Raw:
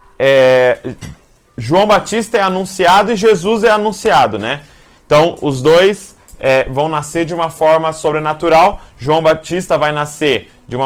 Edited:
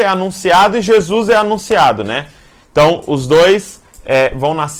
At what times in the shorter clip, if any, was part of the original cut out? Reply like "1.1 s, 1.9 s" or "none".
none

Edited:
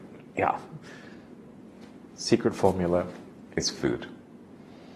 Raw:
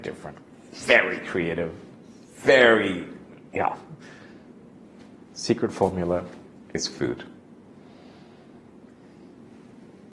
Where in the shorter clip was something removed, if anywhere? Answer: none

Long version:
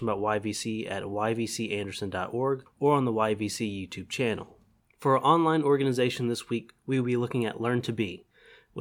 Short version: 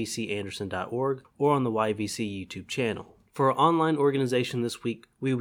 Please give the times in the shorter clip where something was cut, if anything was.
3.3 s

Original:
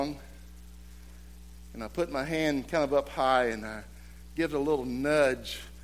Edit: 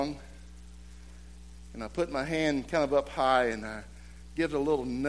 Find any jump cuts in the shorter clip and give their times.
none

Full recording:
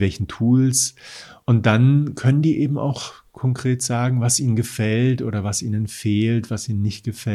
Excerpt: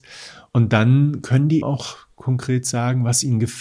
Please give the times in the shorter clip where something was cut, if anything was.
1.6 s

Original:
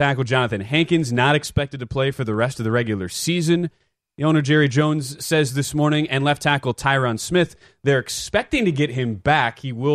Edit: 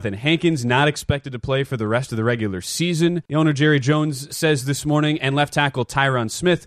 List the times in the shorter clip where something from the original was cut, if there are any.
3.3 s

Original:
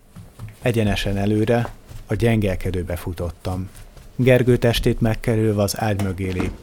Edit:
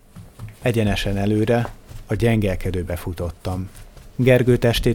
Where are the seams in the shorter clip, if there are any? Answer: none

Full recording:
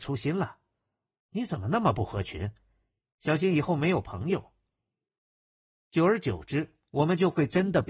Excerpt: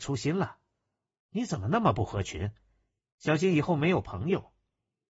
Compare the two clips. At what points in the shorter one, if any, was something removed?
none

